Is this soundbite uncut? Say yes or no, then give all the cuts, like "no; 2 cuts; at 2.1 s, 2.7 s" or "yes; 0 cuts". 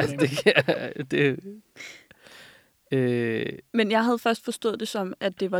no; 1 cut; at 3.7 s